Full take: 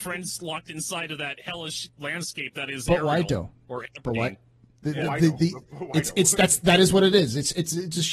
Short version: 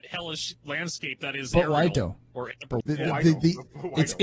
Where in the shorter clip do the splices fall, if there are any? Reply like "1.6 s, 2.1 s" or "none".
2.8 s